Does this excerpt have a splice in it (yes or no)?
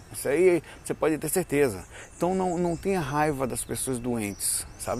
no